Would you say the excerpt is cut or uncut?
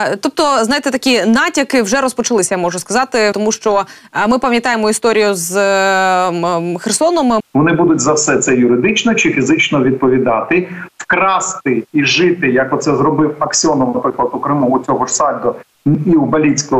cut